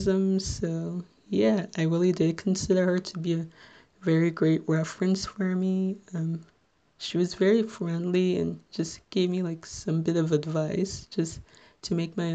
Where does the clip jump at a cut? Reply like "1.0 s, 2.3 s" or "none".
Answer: none